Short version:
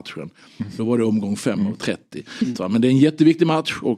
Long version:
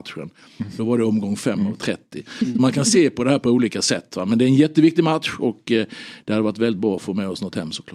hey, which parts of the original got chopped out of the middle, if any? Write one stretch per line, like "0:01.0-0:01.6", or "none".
0:02.5-0:04.1